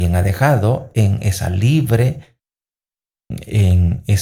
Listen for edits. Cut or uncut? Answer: uncut